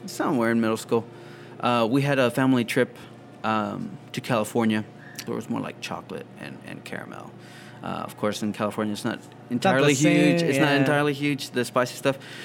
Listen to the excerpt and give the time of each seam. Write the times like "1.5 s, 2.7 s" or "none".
5.3 s